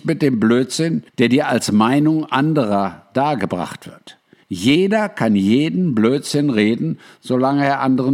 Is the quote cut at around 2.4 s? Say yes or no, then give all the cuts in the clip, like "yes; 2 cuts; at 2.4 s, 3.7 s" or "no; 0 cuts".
no; 2 cuts; at 1.1 s, 4.4 s